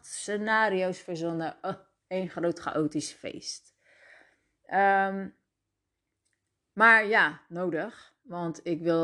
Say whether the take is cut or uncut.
uncut